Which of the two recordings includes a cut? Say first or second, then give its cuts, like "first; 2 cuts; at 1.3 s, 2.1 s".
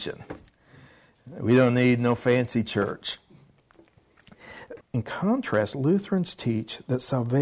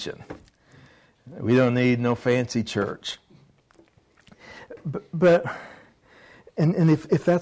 first; 1 cut; at 4.8 s